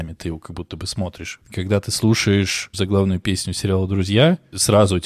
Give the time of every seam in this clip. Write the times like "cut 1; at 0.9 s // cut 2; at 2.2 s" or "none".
cut 1; at 1.4 s